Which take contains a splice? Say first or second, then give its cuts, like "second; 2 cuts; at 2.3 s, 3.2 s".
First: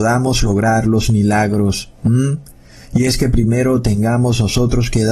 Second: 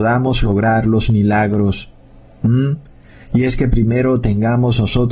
first; 1 cut; at 2.0 s